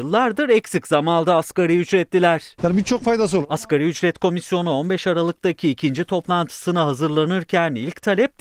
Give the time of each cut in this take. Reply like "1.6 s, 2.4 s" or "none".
2.6 s